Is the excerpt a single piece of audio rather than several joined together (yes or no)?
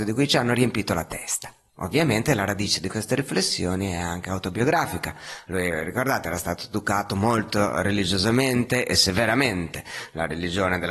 yes